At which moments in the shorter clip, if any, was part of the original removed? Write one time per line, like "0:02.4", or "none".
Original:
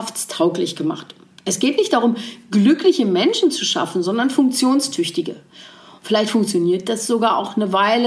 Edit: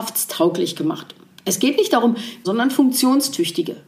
0:02.4